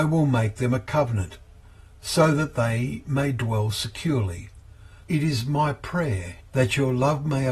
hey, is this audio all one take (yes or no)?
no